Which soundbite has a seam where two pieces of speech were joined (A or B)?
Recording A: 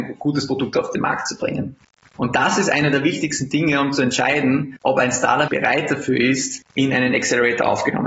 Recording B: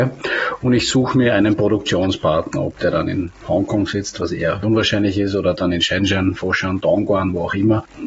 A